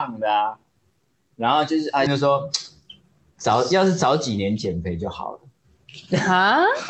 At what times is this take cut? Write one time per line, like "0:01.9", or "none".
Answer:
0:02.1